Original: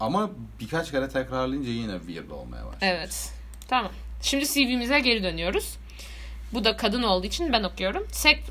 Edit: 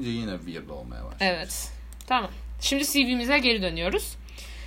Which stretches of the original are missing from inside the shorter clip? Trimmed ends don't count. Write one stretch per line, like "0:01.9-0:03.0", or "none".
none